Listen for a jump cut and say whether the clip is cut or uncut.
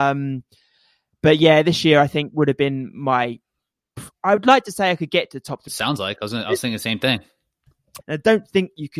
cut